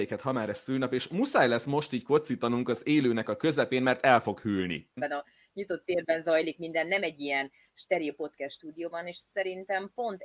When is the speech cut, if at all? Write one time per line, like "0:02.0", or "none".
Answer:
0:05.0